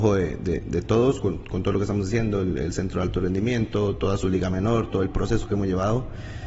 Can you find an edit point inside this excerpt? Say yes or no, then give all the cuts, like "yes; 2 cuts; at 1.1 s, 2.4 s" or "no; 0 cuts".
no; 0 cuts